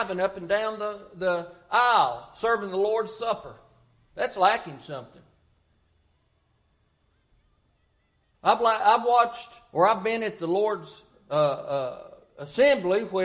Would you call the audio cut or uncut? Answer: uncut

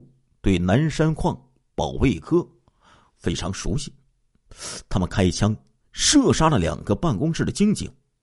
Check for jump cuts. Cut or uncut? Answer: uncut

